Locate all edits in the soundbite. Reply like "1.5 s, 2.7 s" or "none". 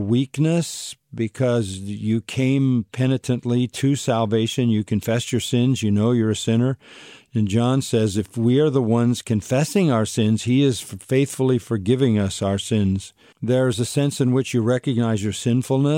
13.3 s